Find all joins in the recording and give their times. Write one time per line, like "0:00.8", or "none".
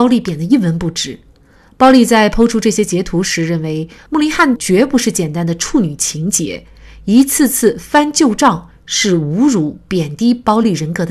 none